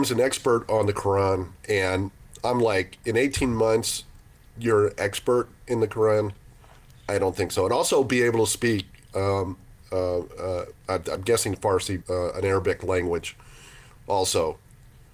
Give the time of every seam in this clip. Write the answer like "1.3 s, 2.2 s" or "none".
10.8 s, 12.0 s, 13.9 s